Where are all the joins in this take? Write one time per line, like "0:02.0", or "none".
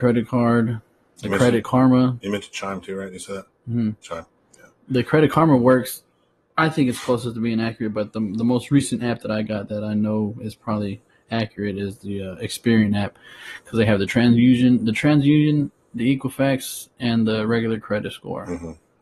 none

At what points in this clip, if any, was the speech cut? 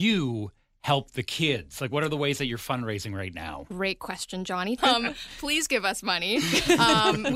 0:04.8

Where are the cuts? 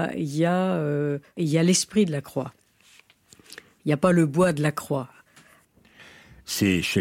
none

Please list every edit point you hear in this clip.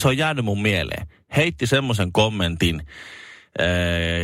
none

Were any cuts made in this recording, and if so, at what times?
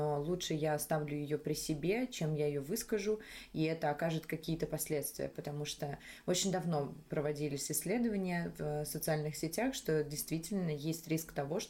none

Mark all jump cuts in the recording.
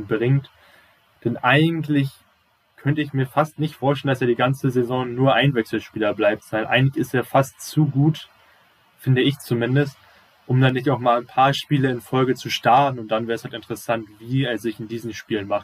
none

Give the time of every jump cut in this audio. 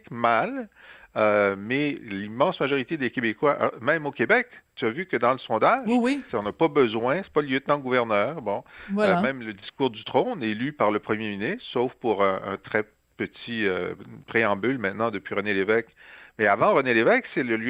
0:06.3

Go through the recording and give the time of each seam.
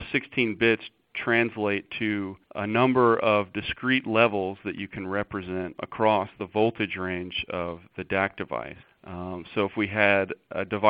0:02.4
0:08.8

